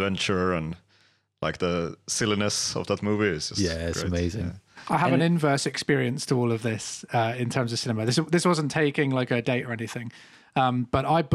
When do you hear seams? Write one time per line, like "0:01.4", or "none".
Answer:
none